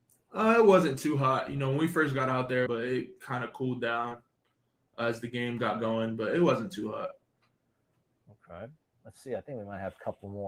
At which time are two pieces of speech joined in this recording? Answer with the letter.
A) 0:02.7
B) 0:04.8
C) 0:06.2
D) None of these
A